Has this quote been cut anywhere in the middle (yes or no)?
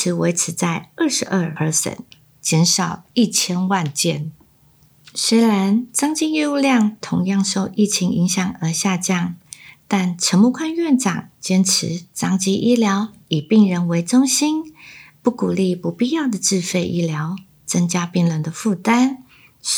yes